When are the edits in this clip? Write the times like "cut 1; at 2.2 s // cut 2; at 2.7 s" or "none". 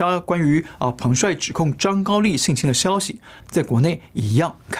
cut 1; at 3.4 s